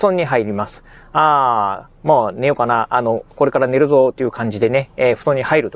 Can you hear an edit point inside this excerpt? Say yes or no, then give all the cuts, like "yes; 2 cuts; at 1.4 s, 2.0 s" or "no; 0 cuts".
no; 0 cuts